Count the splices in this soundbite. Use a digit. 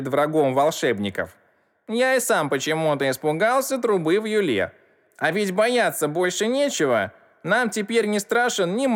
0